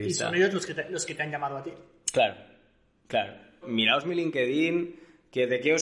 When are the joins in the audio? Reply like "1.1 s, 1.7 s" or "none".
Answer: 3.6 s

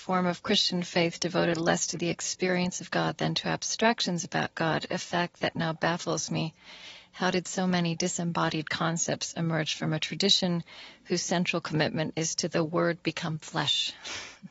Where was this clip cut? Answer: none

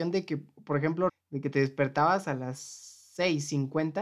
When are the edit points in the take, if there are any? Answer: 1.1 s

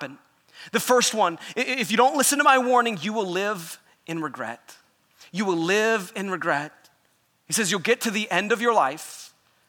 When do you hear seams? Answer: none

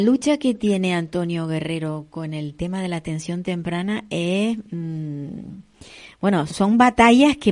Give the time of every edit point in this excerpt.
6.5 s

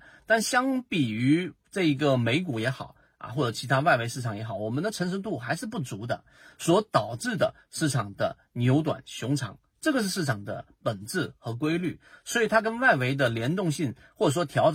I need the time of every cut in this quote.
none

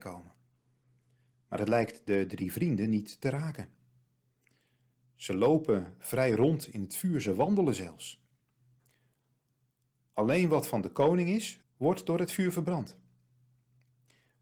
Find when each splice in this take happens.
11.6 s

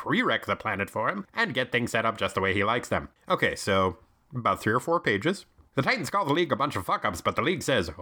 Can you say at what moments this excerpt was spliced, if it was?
3.1 s, 5.7 s

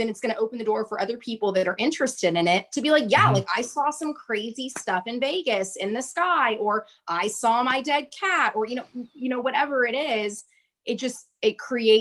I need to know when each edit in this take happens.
none

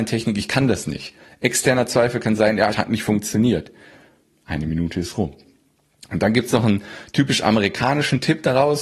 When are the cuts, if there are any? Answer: 2.7 s

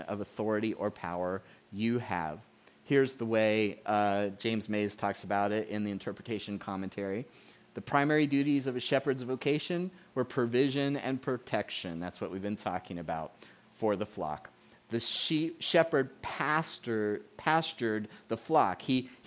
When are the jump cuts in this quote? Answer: none

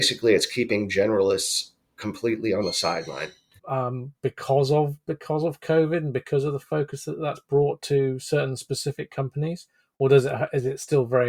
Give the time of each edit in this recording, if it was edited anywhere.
3.6 s

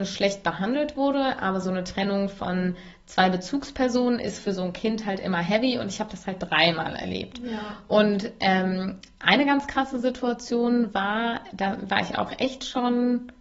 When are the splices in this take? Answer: none

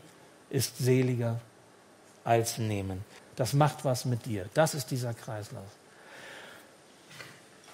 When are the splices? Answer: 3.2 s

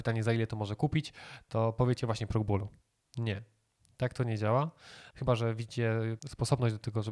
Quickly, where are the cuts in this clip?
5.1 s, 6.2 s

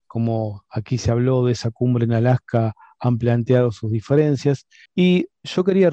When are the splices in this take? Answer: 4.9 s

